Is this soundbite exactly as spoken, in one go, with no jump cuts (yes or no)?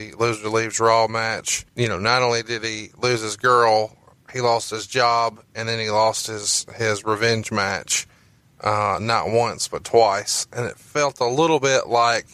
no